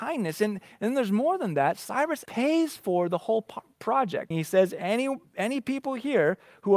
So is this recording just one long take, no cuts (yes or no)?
no